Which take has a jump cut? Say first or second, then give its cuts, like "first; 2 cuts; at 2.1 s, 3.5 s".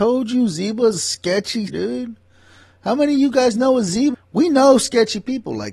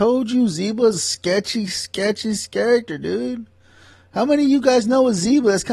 first; 2 cuts; at 1.7 s, 4.1 s